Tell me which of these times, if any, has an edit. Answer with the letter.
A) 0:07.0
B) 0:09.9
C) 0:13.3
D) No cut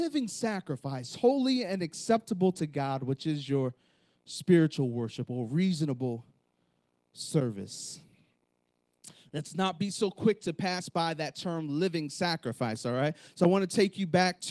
D